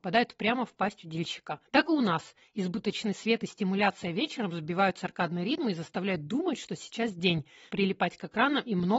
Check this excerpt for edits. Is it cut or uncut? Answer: cut